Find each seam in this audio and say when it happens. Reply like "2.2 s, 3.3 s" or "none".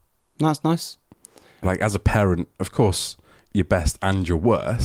1.6 s, 3.4 s